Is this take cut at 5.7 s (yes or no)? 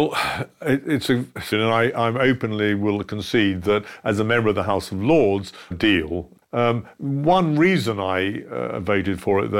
yes